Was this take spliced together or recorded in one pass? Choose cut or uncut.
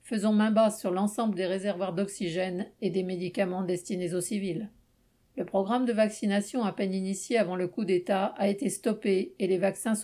uncut